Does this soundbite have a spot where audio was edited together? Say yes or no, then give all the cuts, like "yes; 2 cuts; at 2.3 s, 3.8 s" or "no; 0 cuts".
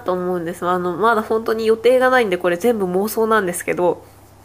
no; 0 cuts